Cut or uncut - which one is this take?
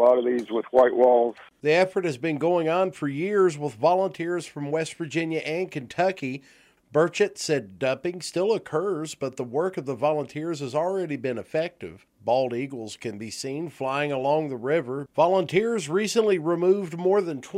cut